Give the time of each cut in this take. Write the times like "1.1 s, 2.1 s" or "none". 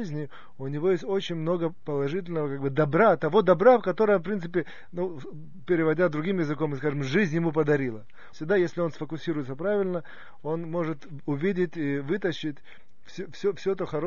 8.3 s